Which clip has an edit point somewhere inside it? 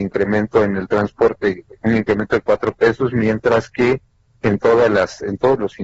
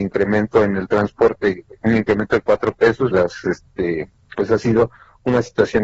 second; 2 cuts; at 3.1 s, 4.3 s

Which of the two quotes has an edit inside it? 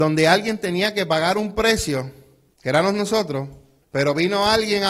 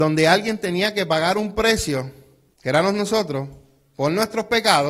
first; 1 cut; at 3.8 s

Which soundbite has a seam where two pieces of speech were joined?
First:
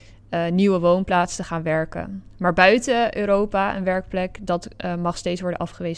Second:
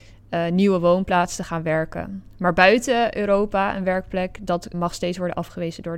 second; 1 cut; at 4.7 s

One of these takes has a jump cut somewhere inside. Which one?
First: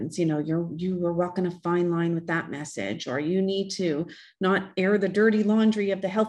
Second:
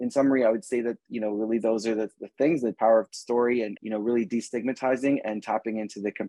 second; 1 cut; at 3.8 s

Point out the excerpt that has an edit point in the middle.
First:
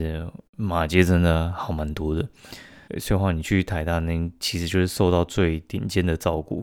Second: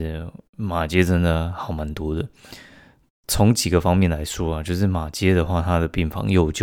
first; 1 cut; at 2.9 s

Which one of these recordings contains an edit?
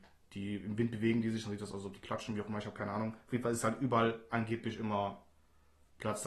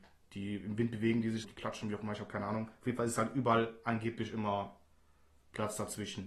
second; 1 cut; at 1.4 s

